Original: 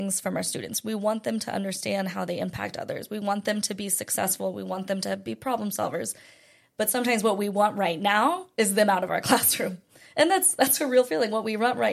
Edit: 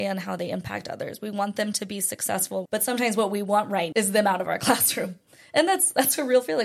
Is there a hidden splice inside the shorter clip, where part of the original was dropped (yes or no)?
yes